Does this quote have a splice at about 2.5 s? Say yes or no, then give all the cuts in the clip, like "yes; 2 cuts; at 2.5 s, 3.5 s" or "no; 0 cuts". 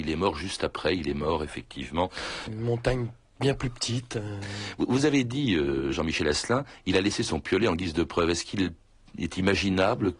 yes; 1 cut; at 2.5 s